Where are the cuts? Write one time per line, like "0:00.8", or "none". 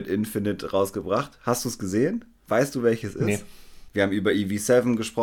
0:03.9